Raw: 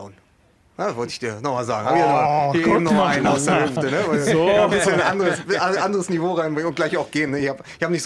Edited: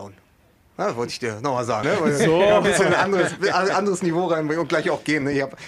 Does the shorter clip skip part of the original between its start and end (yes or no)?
yes